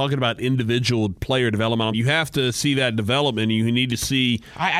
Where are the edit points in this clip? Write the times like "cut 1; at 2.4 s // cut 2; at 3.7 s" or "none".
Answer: cut 1; at 1.9 s